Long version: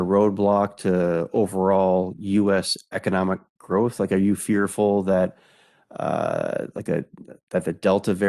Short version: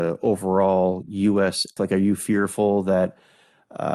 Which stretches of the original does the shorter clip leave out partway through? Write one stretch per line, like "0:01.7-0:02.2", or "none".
0:02.9-0:04.0